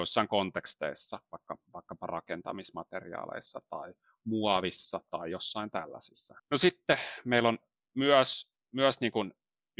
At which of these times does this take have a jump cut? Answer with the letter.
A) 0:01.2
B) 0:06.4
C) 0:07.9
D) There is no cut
B